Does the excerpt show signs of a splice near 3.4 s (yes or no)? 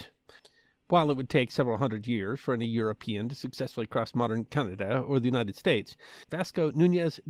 no